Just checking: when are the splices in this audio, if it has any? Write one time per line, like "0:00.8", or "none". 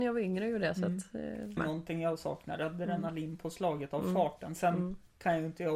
0:01.6